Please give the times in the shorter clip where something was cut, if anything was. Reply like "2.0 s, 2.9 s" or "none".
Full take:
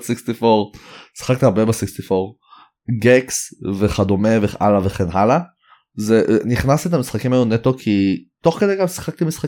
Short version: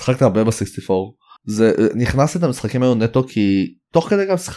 1.4 s